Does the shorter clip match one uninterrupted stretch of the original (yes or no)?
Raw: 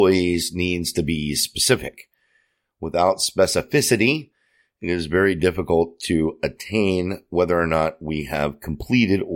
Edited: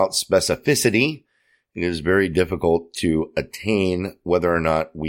yes